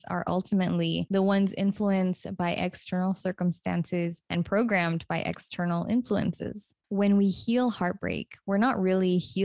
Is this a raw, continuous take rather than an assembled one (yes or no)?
yes